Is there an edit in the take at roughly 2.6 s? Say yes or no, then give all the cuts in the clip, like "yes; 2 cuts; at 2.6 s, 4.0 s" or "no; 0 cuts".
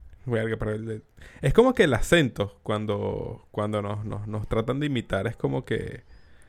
no; 0 cuts